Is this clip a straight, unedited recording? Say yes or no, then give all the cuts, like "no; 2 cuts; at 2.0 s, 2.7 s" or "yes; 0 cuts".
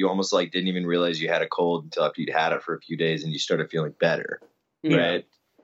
yes; 0 cuts